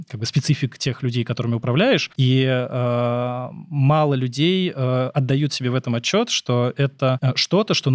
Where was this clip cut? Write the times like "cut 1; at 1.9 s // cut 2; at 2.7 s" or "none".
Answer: cut 1; at 2.1 s